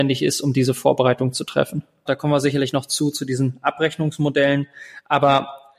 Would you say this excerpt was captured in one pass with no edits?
no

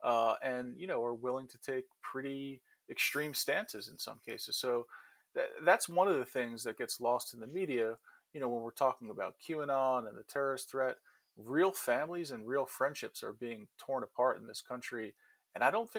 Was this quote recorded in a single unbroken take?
yes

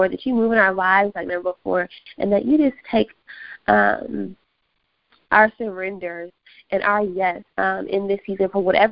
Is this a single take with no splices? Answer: no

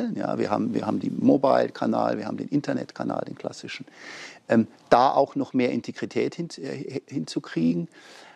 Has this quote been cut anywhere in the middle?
no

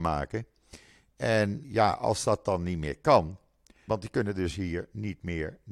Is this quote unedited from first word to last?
no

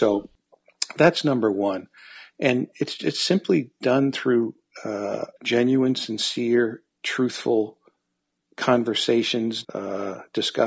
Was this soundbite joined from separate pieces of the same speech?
yes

